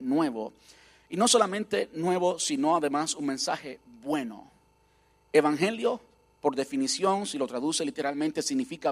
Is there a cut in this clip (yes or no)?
no